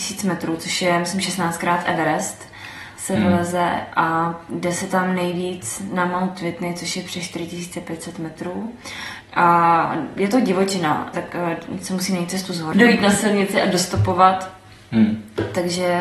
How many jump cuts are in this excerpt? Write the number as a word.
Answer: three